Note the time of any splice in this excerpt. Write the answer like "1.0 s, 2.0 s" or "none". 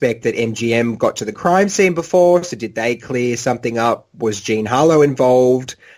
none